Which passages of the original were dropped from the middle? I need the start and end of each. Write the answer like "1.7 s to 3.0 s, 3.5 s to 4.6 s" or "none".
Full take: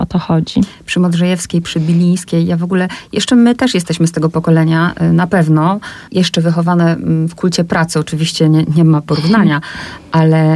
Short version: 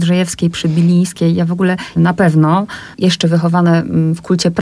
3.1 s to 5.1 s